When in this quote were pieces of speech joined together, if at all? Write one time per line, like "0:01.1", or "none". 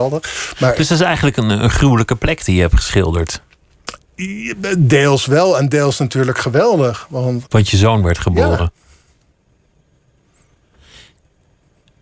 0:07.5